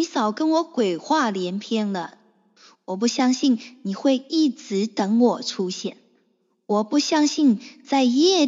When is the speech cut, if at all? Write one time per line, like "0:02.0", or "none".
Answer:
none